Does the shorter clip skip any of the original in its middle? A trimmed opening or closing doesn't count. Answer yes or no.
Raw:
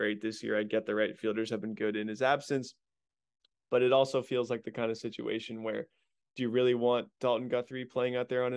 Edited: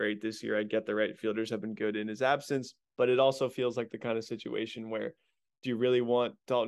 yes